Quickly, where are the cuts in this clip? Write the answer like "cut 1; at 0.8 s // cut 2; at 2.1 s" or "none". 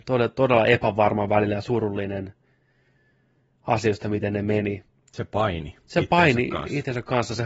none